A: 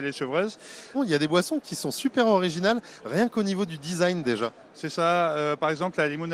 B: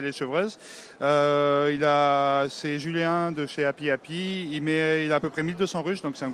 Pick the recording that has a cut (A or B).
A